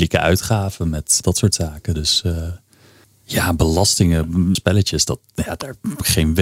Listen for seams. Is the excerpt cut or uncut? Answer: cut